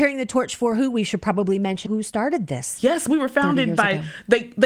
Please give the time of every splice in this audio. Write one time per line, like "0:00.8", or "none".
0:01.9